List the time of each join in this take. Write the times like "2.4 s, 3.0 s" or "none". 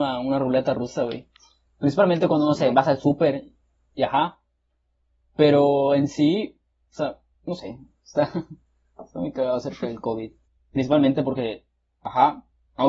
none